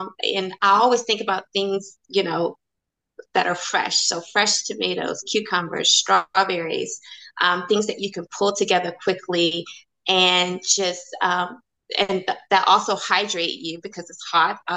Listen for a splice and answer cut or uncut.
uncut